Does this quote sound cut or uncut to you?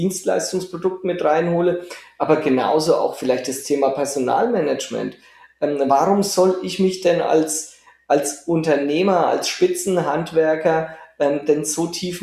uncut